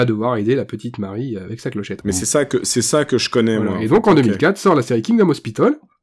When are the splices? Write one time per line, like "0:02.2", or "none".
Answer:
0:02.0